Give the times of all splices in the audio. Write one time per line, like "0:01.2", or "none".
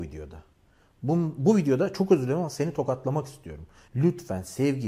0:03.9